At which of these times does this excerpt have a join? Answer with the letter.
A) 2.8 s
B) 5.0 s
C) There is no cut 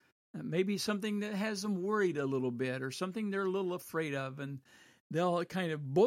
C